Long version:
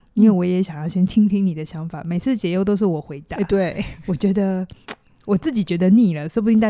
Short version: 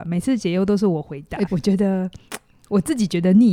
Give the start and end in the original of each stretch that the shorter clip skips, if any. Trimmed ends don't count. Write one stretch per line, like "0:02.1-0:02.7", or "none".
0:03.5-0:04.0